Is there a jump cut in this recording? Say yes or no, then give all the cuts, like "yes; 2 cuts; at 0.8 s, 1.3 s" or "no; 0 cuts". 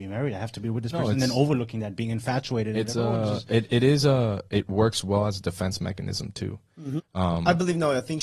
yes; 2 cuts; at 4.5 s, 7.0 s